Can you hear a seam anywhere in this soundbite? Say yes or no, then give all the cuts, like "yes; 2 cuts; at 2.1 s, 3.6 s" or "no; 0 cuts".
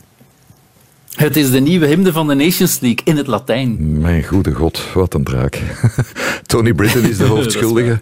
no; 0 cuts